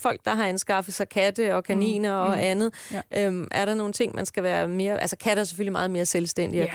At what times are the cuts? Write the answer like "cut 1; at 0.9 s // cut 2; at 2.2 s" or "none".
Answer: none

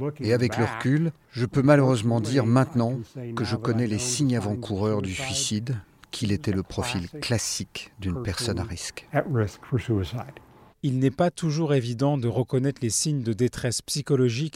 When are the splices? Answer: none

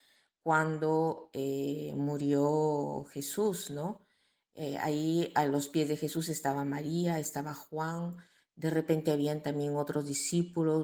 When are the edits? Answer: none

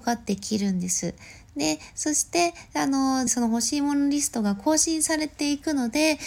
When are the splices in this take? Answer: cut 1; at 3.3 s

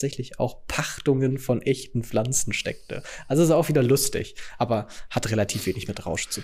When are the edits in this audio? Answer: none

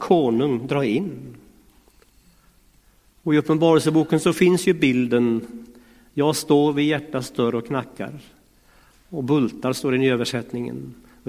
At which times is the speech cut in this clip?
none

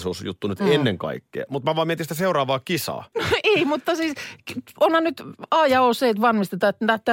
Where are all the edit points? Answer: cut 1; at 3.1 s

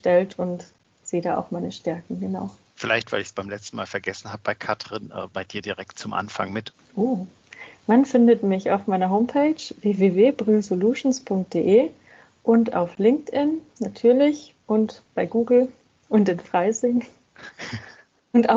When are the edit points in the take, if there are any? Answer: cut 1; at 2.7 s // cut 2; at 6.7 s // cut 3; at 14.6 s

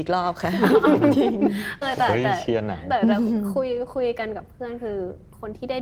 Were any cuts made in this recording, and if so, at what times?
cut 1; at 1.8 s

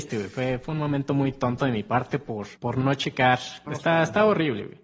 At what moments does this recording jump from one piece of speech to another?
cut 1; at 2.6 s // cut 2; at 3.7 s

